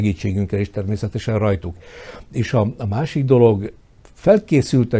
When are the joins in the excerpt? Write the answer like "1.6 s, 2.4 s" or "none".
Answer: none